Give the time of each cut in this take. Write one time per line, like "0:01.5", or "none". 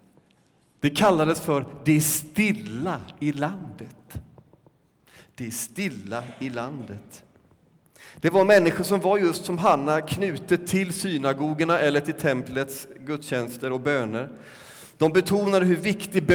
none